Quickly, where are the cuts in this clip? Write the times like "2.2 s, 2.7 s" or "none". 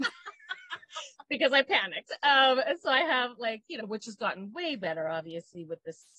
3.8 s